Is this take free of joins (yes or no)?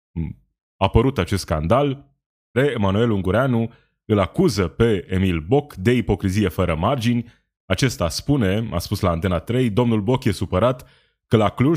no